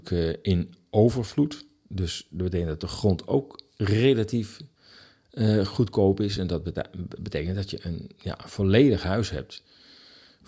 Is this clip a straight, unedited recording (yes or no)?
yes